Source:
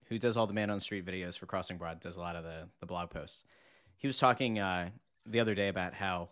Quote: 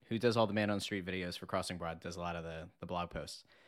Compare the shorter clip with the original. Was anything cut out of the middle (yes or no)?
no